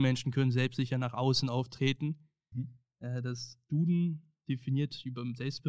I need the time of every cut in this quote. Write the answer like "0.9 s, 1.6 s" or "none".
2.5 s